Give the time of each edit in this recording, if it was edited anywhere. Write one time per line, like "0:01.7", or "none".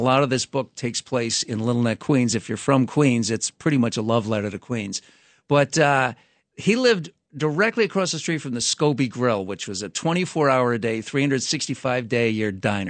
none